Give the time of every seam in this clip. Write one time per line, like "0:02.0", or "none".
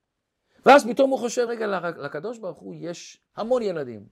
0:01.5